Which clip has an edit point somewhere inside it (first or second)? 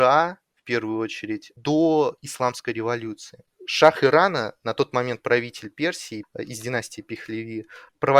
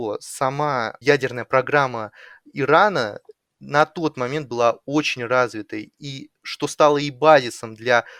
first